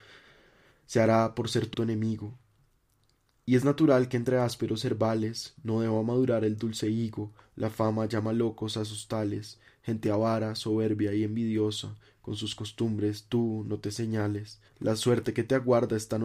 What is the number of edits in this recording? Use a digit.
2